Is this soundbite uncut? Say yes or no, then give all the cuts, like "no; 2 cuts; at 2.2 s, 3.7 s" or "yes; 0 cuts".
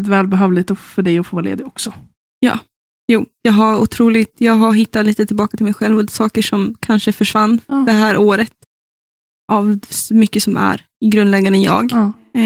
yes; 0 cuts